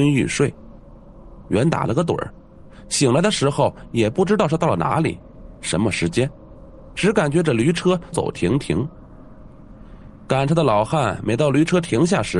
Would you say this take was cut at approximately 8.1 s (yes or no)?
yes